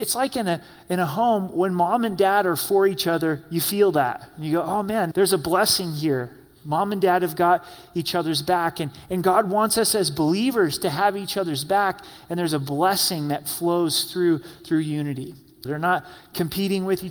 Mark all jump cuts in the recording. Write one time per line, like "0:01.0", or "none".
0:05.1
0:15.6